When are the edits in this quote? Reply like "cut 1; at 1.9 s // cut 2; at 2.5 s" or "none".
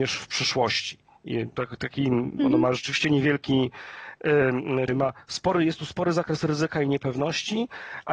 cut 1; at 4.9 s